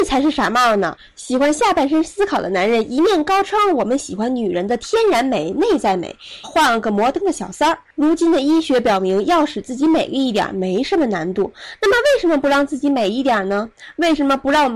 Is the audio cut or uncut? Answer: cut